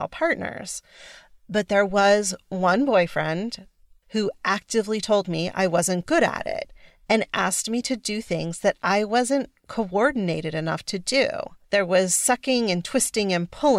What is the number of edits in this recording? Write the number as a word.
two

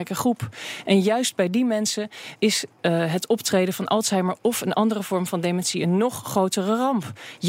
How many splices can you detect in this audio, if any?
one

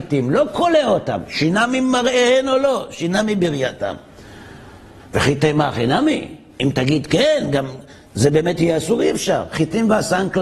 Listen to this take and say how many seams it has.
zero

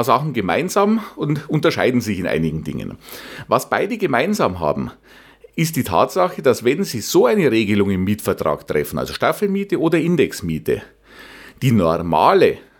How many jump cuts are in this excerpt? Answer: zero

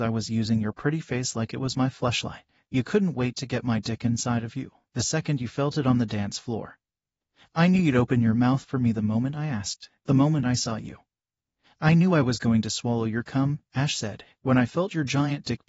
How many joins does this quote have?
zero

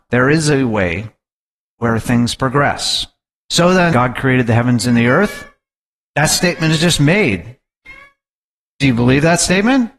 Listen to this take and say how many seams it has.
one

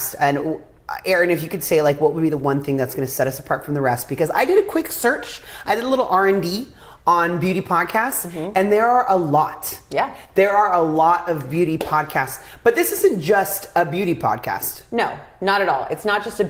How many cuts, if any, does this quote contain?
zero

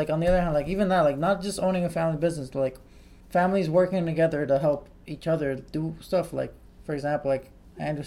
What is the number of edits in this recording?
one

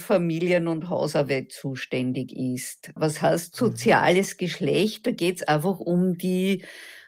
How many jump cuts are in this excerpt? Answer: one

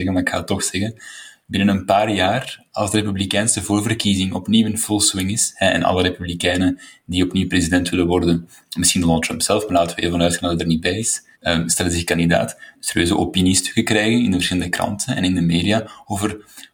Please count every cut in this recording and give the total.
two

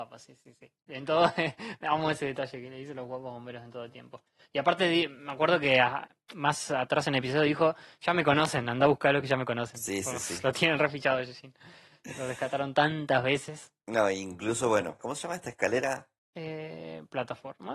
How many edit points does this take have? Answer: two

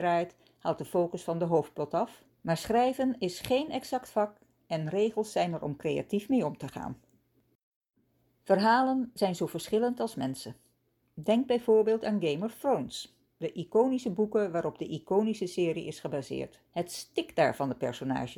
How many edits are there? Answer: two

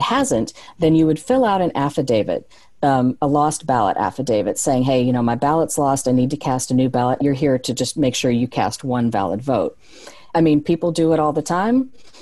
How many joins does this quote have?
two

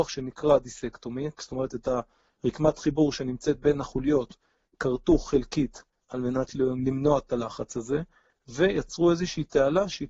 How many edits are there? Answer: zero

